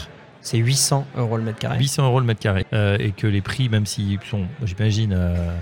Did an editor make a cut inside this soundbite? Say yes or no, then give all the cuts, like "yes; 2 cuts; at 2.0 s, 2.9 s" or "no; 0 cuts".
yes; 1 cut; at 2.6 s